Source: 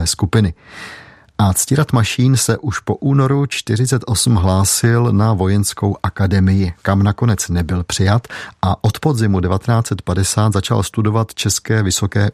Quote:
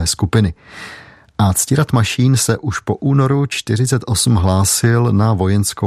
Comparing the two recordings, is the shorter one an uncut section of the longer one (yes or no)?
yes